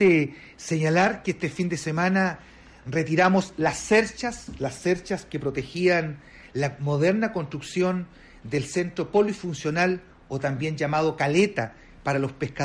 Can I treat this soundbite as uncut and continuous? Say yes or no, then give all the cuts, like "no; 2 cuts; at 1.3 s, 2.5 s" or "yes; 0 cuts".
yes; 0 cuts